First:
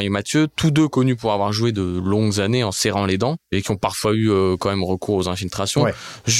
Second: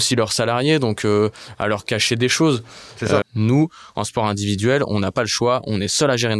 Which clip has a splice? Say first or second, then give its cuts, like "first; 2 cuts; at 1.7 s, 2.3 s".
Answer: second; 1 cut; at 3.2 s